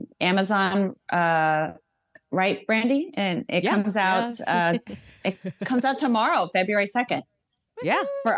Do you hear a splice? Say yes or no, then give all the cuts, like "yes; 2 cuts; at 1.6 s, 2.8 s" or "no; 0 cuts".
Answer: no; 0 cuts